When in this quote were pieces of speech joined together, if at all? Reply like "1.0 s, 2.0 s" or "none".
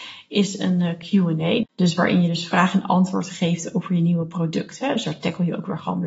1.6 s